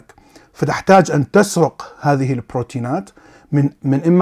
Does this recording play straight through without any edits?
yes; 0 cuts

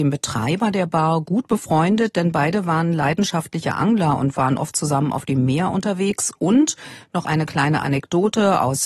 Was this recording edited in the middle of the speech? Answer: no; 0 cuts

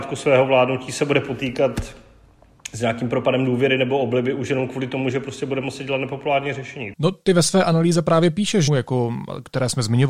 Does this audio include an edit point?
yes; 2 cuts; at 6.9 s, 8.7 s

